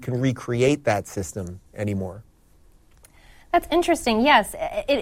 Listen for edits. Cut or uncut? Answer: uncut